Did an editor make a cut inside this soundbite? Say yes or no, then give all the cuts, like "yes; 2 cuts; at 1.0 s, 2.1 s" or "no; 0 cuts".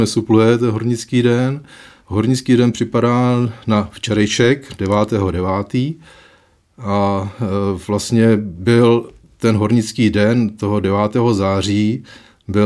no; 0 cuts